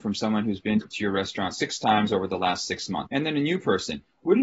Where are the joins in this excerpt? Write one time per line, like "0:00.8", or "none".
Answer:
0:03.1